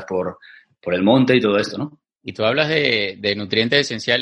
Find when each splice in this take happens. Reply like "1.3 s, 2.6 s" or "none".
2.1 s